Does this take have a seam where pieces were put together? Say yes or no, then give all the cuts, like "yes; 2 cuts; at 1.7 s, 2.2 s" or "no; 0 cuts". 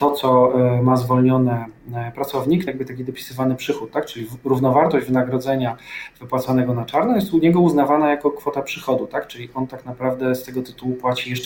yes; 1 cut; at 2.7 s